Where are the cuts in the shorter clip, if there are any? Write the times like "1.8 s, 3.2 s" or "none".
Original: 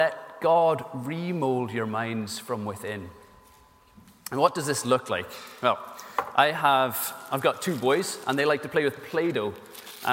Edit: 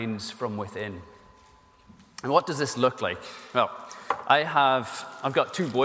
none